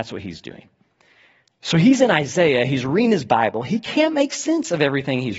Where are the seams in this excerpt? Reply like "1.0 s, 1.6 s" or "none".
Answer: none